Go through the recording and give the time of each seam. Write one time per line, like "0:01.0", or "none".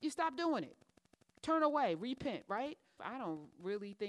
0:03.0